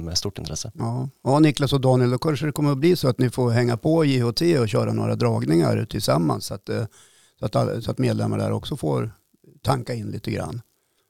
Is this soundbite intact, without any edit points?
yes; 0 cuts

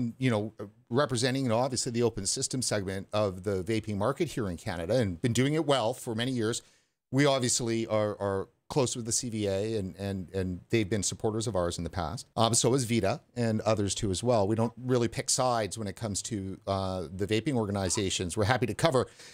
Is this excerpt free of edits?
no; 1 cut; at 12.3 s

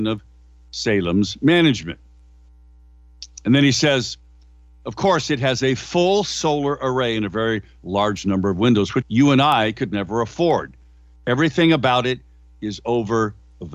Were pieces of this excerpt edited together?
yes; 1 cut; at 9.0 s

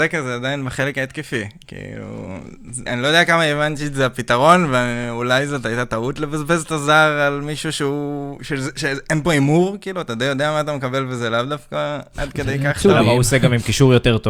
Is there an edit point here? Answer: yes; 1 cut; at 2.9 s

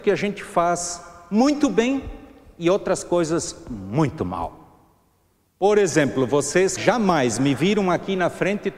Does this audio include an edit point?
yes; 1 cut; at 6.8 s

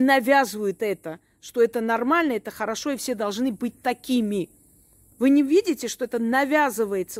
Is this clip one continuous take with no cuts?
yes; 0 cuts

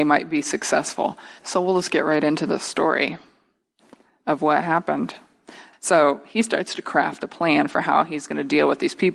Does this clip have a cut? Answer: yes; 2 cuts; at 1.4 s, 5.7 s

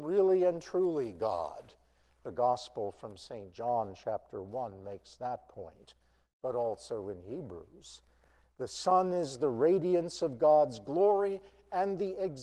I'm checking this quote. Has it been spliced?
no; 0 cuts

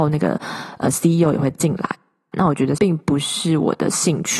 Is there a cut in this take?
yes; 1 cut; at 2.3 s

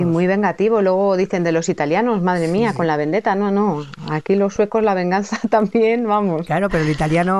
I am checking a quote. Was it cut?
no; 0 cuts

